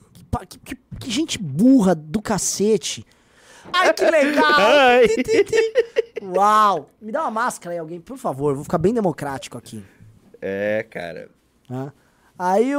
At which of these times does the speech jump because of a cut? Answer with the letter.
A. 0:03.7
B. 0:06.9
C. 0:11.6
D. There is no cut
A